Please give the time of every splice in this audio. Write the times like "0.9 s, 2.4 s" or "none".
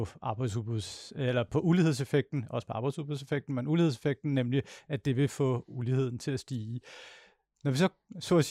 none